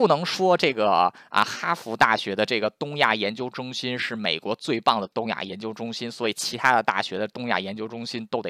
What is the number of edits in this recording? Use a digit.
0